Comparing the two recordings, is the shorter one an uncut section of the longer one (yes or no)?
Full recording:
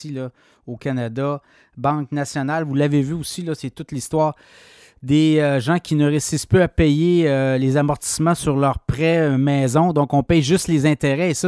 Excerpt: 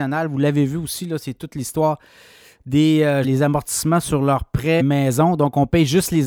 no